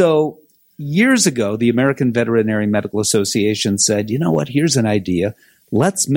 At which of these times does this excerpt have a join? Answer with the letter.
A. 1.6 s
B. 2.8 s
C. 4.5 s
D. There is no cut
D